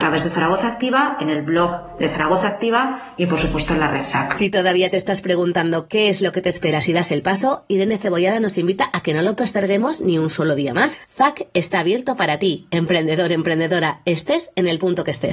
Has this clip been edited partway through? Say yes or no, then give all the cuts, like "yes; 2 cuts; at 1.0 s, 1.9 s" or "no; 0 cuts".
no; 0 cuts